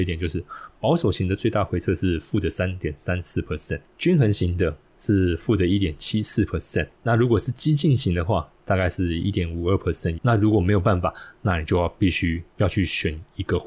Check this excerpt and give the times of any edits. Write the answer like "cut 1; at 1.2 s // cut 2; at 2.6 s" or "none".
cut 1; at 10.2 s